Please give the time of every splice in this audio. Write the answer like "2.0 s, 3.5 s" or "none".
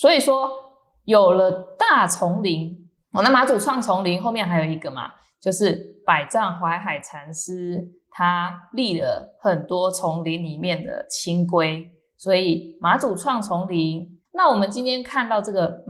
3.0 s, 14.2 s